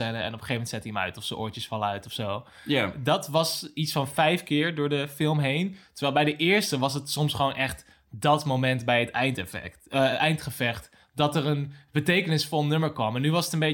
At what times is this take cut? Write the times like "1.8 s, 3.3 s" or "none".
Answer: none